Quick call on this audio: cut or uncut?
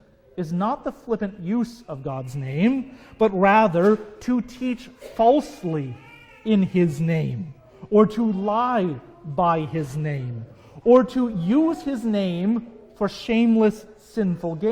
uncut